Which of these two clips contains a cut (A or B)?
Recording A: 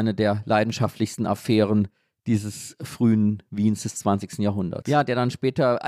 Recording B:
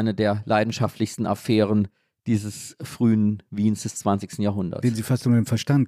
A